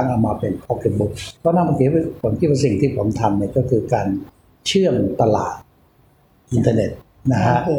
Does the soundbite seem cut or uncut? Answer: cut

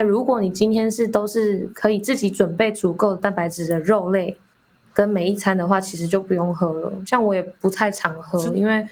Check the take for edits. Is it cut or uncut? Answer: uncut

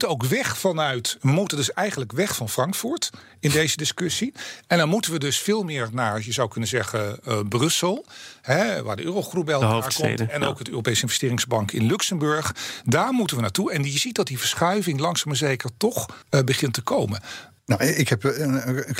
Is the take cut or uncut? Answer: cut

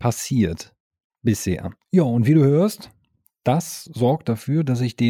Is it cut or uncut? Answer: cut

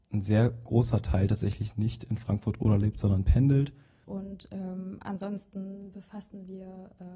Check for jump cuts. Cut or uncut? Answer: cut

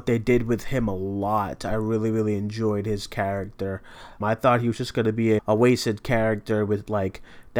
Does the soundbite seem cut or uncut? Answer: cut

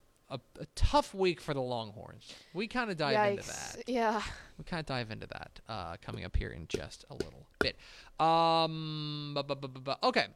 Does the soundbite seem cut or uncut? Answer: uncut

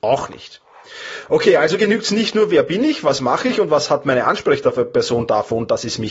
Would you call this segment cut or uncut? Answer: uncut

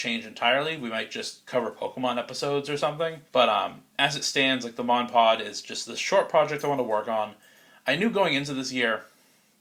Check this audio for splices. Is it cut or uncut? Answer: cut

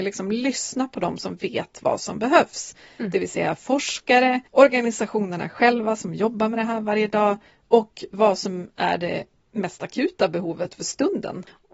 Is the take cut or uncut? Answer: cut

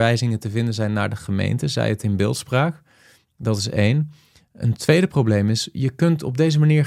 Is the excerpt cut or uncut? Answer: uncut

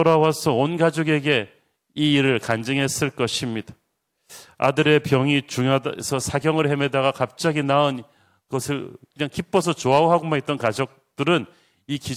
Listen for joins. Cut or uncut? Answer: uncut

